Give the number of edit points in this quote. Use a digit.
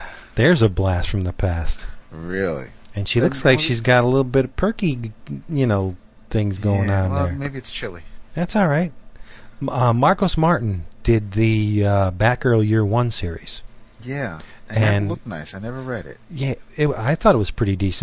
0